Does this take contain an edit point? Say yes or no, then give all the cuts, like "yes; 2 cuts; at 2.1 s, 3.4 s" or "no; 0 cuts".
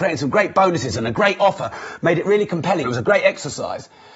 yes; 1 cut; at 2.8 s